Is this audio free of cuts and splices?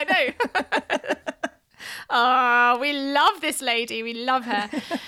yes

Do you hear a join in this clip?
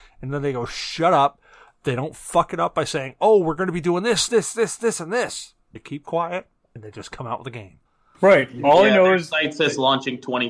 yes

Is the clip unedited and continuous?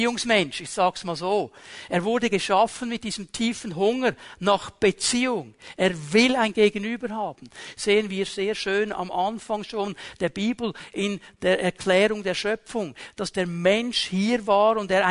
yes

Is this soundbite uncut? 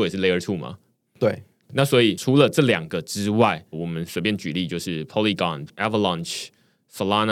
no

